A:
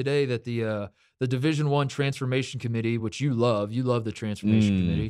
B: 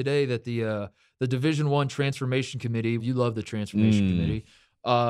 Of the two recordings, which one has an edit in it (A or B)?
B